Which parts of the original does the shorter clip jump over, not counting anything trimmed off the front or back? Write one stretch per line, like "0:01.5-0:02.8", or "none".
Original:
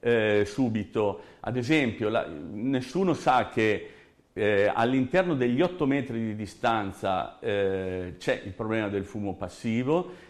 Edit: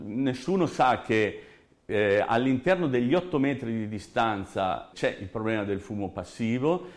0:07.4-0:08.2